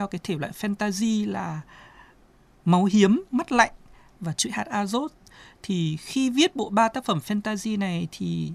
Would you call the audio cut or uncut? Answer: uncut